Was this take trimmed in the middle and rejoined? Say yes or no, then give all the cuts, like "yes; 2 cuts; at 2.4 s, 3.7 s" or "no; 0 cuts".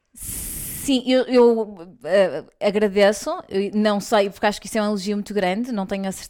no; 0 cuts